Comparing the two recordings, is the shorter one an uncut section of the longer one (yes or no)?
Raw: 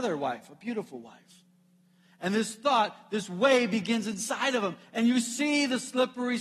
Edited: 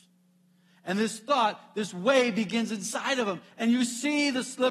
yes